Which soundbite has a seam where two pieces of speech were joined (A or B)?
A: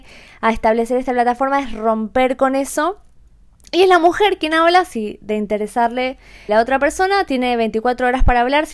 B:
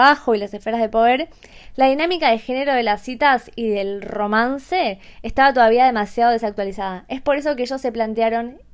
A